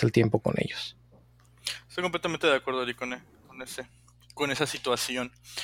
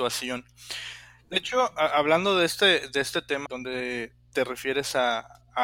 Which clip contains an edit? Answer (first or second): second